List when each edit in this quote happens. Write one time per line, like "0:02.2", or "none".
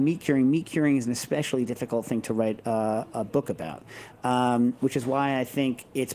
none